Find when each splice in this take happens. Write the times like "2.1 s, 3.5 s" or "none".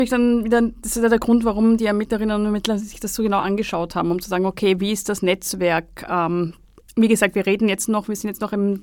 none

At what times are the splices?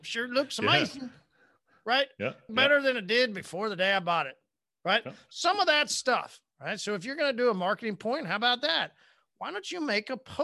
2.5 s

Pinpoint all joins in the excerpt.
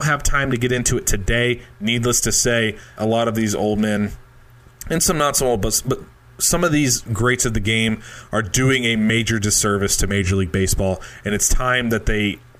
3.0 s

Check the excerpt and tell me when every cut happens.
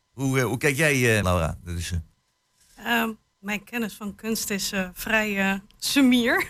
1.2 s

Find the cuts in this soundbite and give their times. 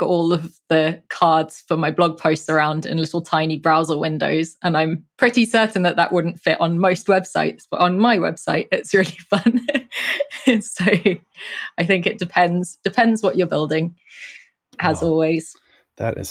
none

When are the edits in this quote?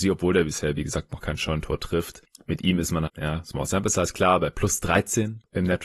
3.1 s

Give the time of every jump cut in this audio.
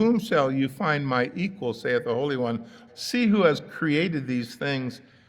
2.9 s

